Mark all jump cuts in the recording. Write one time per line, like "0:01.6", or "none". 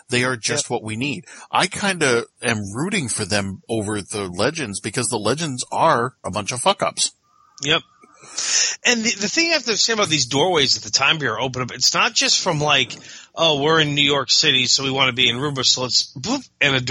0:06.2

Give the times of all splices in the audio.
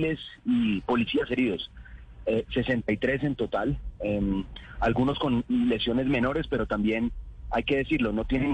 none

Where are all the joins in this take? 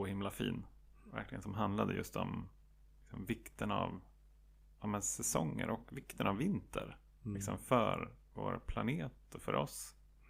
none

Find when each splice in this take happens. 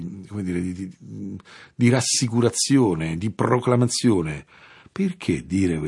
0:04.8

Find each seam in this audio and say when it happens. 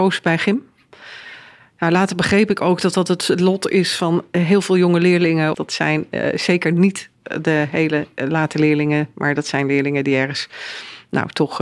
0:05.5

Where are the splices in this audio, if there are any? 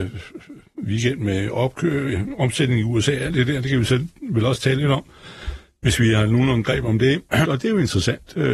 0:07.4

